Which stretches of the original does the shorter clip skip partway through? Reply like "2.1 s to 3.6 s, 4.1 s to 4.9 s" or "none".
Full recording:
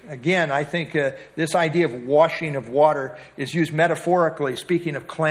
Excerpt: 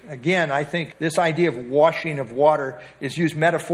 0.9 s to 1.3 s